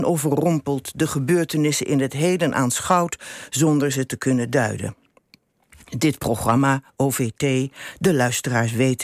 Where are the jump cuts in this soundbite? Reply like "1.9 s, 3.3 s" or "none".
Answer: none